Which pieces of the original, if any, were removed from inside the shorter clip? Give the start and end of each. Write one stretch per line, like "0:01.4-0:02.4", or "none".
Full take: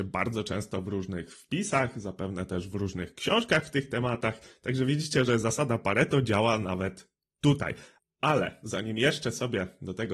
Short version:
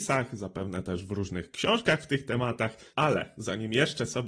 0:04.5-0:08.2